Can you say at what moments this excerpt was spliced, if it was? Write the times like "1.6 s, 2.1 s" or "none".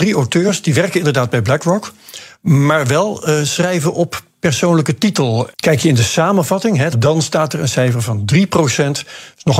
5.5 s, 6.9 s